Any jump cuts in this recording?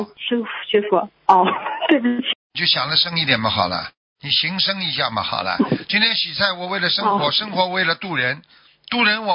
yes; 1 cut; at 2.3 s

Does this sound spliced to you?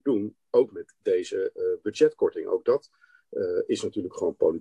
no; 0 cuts

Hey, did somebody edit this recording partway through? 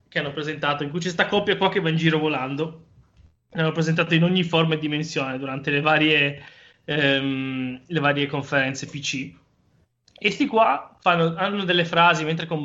no; 0 cuts

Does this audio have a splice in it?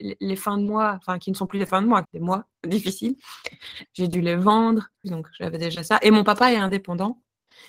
yes; 3 cuts; at 2.0 s, 3.8 s, 5.0 s

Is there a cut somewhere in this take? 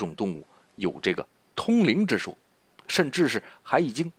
no; 0 cuts

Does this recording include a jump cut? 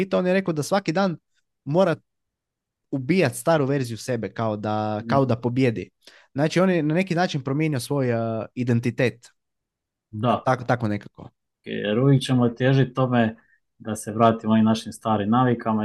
yes; 1 cut; at 11.6 s

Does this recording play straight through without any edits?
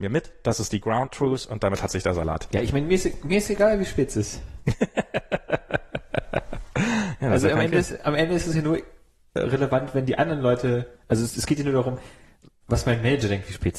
yes; 0 cuts

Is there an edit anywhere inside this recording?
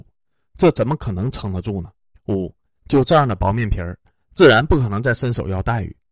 yes; 1 cut; at 2.1 s

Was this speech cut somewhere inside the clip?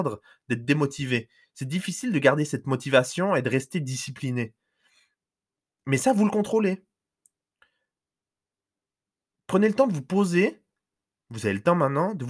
no; 0 cuts

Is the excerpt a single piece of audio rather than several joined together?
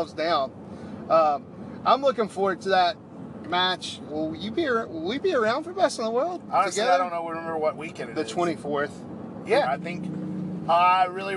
no; 2 cuts; at 4.1 s, 9.6 s

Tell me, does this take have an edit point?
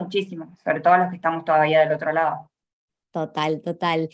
no; 0 cuts

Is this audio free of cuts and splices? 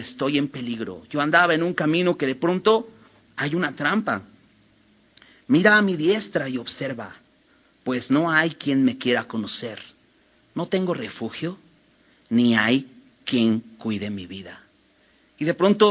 yes; 0 cuts

